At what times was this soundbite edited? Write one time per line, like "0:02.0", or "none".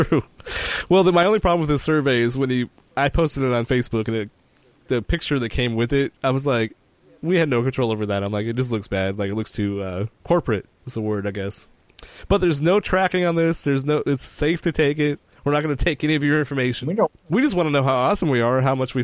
0:16.8